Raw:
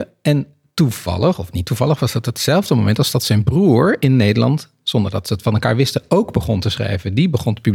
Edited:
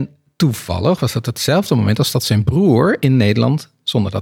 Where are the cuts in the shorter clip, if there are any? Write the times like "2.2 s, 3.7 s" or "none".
1.0 s

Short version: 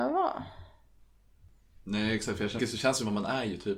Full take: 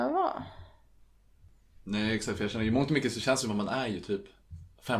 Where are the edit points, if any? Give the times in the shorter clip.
2.6 s

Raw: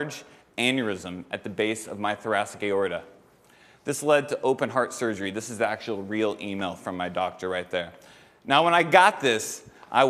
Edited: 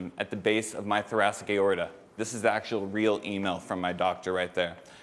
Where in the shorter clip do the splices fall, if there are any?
2.2 s

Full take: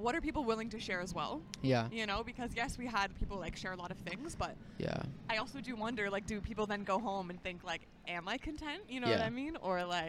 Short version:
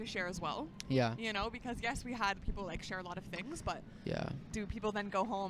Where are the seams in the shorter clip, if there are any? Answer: 4.5 s

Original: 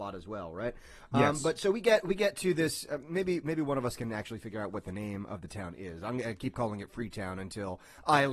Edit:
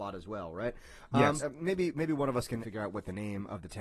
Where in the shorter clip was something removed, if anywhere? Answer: 1.4 s, 2.6 s

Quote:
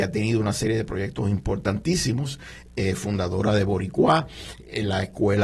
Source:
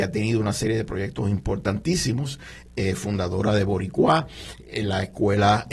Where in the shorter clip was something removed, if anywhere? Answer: none

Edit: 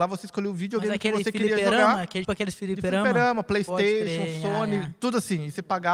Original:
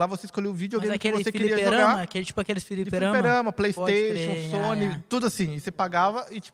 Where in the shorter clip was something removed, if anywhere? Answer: 2.2 s

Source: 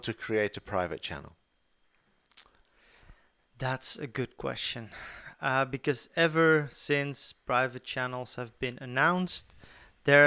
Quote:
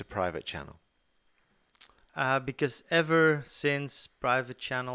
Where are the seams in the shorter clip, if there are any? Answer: 2.1 s

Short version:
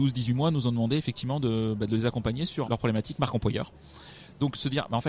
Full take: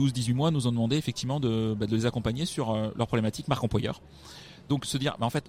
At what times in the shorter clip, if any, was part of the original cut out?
2.6 s

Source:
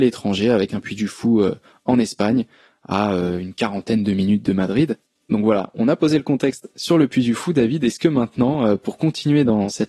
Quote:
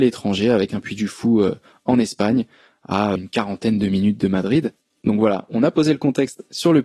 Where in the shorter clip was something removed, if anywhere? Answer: 3.2 s

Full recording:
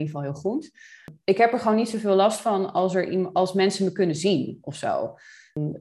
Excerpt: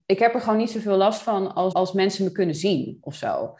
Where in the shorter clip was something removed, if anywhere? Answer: 1.7 s

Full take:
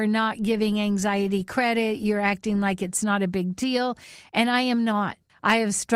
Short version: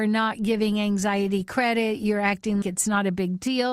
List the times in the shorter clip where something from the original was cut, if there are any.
2.6 s

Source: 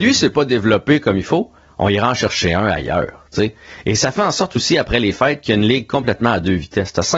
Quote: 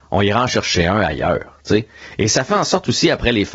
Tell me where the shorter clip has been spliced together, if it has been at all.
none

